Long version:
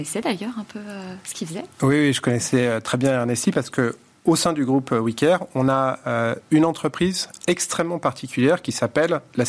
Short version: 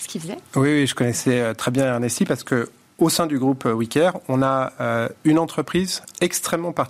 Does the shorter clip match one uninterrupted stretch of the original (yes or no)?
yes